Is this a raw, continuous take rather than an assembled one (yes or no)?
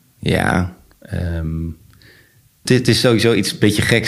no